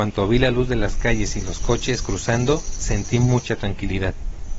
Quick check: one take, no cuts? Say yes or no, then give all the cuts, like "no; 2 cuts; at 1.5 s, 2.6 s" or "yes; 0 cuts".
yes; 0 cuts